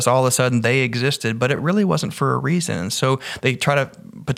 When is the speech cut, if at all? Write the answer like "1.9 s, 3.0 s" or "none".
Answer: none

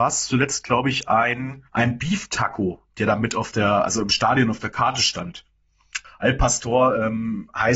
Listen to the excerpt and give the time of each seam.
1.7 s, 6.0 s

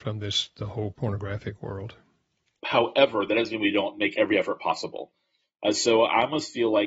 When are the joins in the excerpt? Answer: 2.6 s

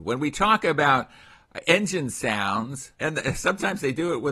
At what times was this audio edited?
2.9 s

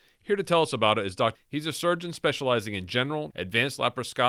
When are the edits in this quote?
1.3 s, 3.3 s

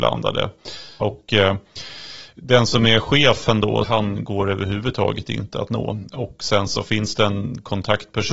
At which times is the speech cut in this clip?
1.0 s, 3.8 s

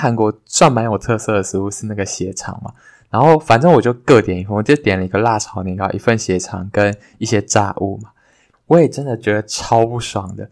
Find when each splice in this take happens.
8.5 s

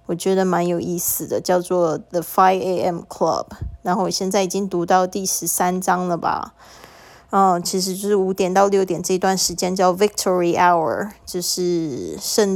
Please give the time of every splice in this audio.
7.6 s

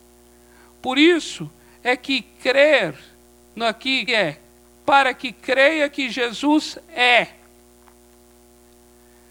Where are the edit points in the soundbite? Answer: 4.1 s

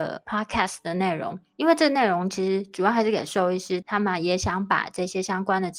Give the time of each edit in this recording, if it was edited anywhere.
3.8 s

